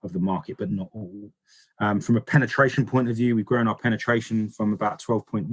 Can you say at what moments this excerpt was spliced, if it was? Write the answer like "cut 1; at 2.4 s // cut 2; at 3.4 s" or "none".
none